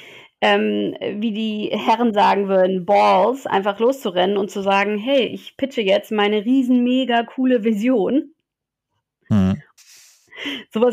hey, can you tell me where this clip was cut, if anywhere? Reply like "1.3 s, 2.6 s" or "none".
9.8 s